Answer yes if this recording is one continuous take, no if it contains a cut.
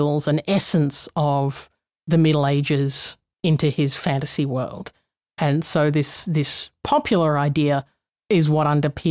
yes